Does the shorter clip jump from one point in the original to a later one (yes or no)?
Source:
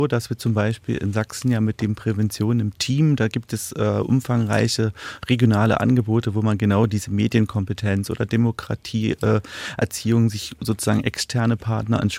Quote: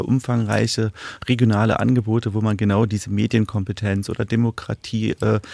no